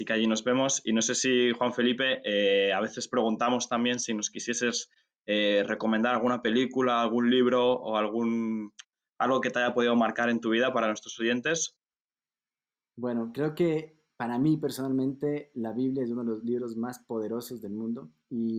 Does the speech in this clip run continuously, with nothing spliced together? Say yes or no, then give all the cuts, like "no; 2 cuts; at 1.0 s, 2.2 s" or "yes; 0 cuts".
yes; 0 cuts